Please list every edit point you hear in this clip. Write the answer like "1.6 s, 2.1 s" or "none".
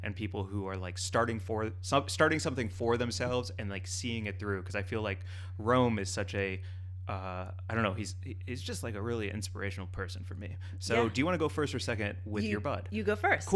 none